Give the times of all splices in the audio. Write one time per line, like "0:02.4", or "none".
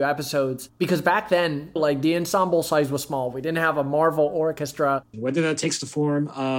0:01.8
0:05.1